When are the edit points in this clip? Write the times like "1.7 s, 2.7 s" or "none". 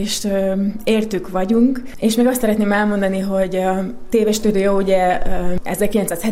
none